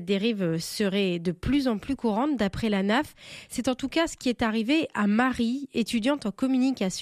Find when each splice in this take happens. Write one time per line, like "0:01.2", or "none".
none

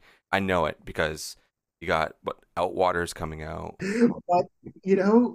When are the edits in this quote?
0:03.8

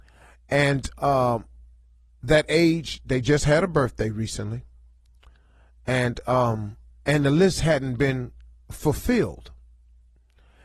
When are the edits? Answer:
0:07.0

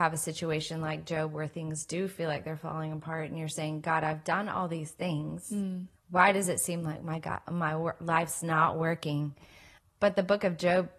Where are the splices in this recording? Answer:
0:06.0
0:09.8

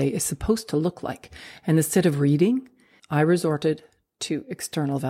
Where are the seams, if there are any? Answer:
0:03.0

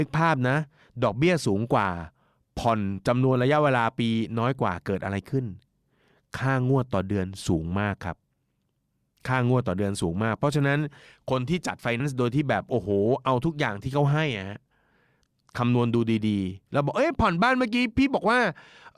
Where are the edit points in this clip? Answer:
0:12.0

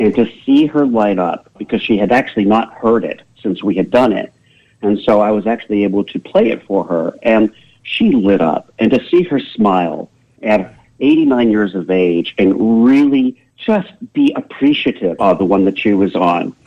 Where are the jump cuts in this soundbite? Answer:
0:13.5
0:15.2

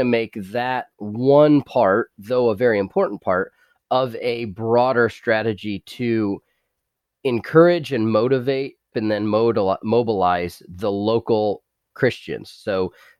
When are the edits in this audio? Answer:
0:08.9

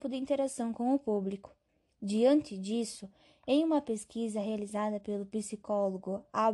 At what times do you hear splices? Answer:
none

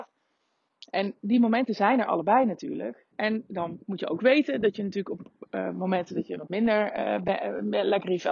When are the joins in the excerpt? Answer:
0:03.1

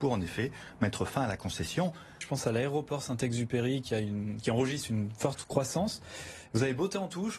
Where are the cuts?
0:02.2

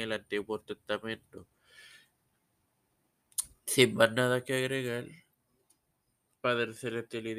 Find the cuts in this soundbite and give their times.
none

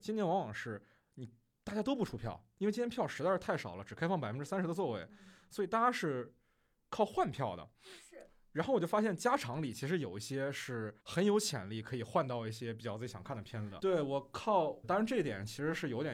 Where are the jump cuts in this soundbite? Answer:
0:11.0
0:13.8
0:14.8

